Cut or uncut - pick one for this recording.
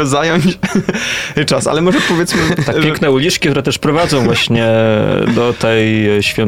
uncut